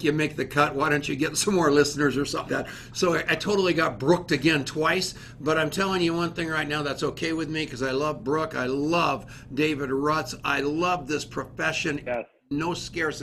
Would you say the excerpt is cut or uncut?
cut